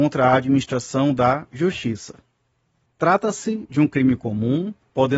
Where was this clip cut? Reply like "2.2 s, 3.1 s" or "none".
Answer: 2.9 s